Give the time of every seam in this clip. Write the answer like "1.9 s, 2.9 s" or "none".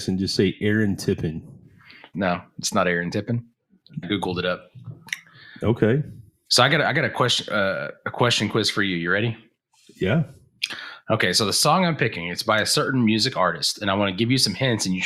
2.1 s, 4.0 s